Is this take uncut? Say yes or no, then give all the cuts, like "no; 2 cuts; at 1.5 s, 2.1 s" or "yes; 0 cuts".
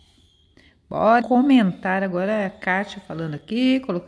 no; 1 cut; at 1.2 s